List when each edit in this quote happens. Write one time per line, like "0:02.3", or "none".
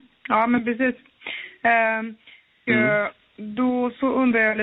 0:02.7